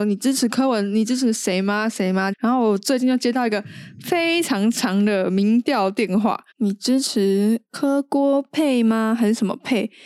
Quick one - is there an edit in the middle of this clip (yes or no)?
yes